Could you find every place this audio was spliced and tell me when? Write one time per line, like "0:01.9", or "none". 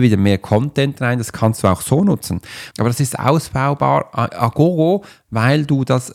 0:02.7
0:04.3